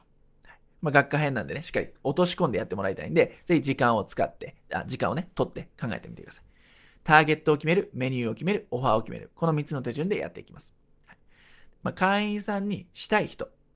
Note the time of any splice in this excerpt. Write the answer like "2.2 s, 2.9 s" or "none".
11.7 s